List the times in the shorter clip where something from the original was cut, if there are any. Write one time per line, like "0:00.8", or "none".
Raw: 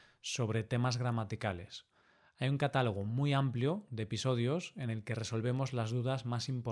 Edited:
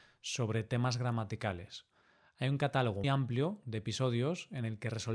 0:03.0